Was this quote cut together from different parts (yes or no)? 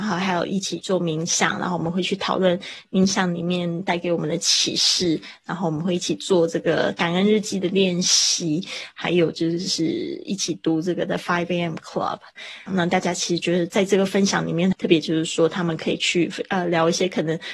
yes